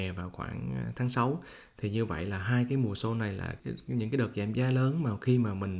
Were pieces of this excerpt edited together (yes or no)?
yes